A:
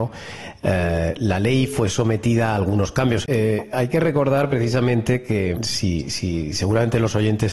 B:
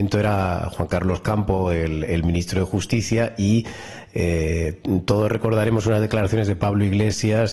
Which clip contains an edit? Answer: A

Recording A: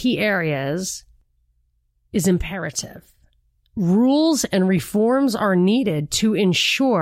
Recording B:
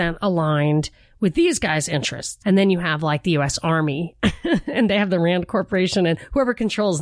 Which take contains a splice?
B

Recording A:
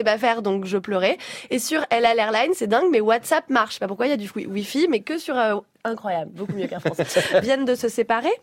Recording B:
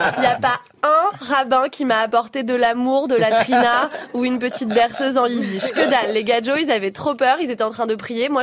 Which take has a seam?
A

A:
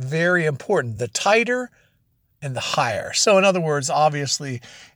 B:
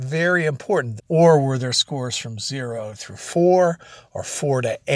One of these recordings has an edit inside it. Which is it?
B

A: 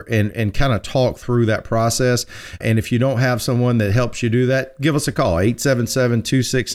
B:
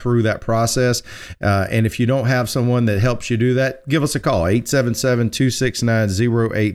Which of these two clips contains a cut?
A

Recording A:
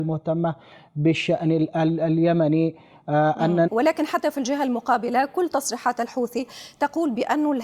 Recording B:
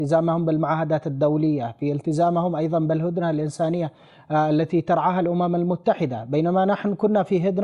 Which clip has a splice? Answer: A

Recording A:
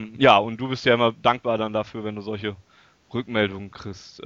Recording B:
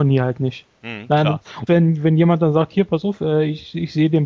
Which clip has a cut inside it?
B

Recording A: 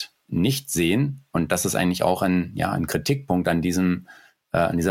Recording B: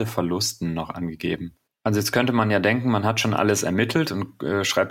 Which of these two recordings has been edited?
B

